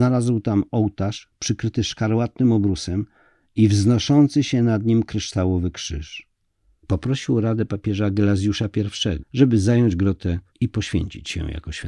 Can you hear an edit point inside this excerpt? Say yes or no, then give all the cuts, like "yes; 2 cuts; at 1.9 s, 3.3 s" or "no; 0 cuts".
yes; 3 cuts; at 6.8 s, 9.2 s, 10.5 s